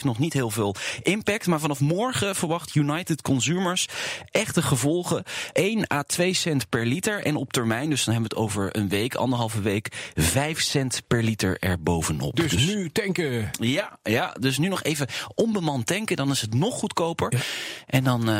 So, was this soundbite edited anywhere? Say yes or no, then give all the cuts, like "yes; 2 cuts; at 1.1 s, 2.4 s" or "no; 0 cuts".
no; 0 cuts